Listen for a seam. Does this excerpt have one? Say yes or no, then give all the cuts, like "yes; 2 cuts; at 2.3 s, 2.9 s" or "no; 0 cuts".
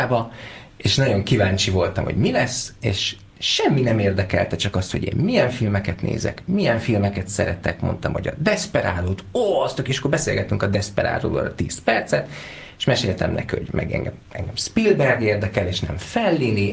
no; 0 cuts